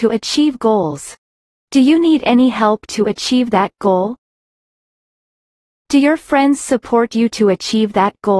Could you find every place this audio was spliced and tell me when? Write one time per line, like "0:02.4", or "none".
0:01.6
0:05.7